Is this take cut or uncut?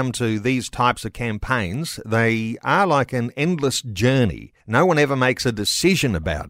cut